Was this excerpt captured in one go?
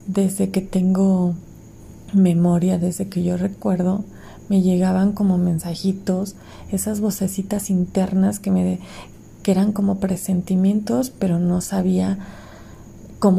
yes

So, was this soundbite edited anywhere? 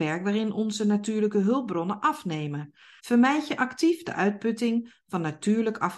yes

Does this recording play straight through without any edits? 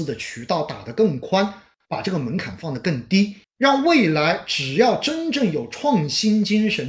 no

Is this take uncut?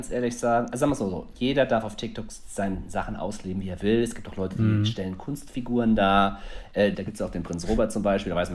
no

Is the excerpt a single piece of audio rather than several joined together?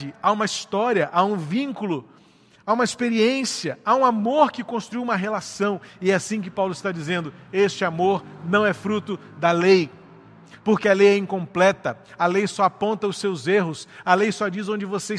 yes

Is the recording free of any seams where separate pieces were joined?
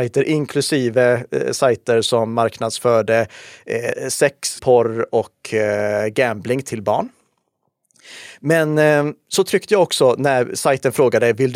no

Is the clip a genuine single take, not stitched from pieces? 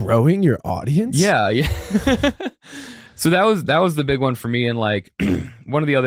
yes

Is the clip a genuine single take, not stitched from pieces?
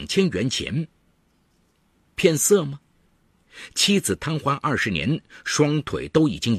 yes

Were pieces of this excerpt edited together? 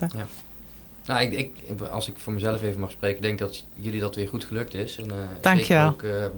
no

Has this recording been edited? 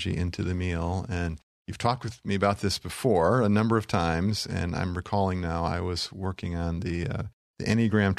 no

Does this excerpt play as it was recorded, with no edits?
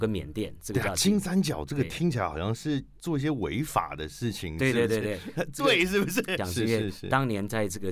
no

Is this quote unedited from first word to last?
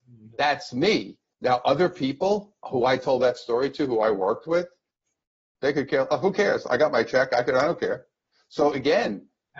yes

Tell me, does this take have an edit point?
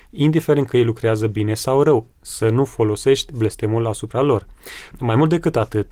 yes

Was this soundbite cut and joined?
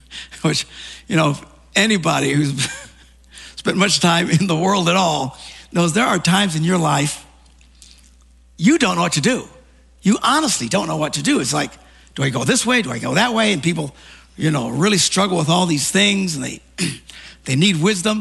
no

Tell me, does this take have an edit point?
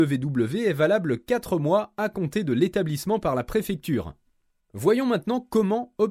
no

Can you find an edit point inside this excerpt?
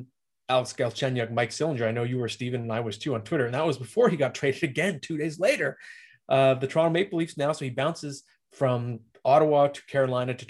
no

